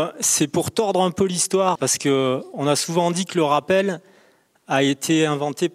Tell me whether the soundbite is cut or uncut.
cut